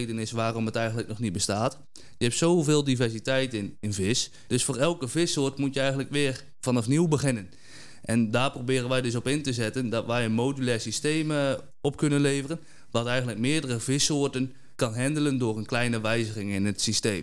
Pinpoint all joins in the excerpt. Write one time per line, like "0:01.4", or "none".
0:04.5